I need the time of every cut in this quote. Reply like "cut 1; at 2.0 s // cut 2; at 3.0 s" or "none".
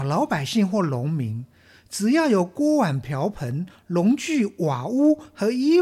none